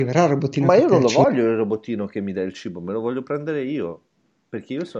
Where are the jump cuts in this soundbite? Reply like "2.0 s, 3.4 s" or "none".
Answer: none